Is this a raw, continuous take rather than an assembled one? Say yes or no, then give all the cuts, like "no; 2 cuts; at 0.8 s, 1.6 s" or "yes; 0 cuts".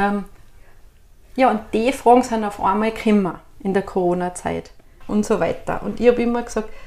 no; 1 cut; at 5.0 s